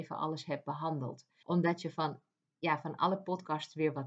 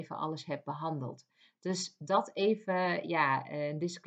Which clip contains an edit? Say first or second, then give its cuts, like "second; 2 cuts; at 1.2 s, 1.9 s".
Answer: first; 1 cut; at 1.4 s